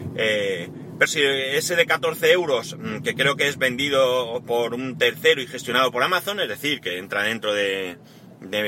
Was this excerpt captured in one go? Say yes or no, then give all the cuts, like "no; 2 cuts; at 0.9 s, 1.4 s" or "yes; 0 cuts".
no; 1 cut; at 1.1 s